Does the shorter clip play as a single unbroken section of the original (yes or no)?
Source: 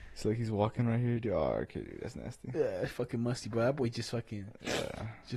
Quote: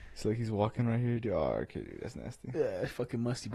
yes